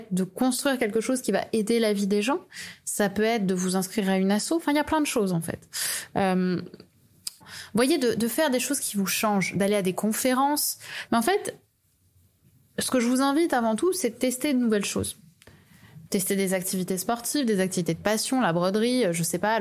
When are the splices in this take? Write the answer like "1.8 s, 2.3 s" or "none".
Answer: 7.4 s, 11.1 s, 16.1 s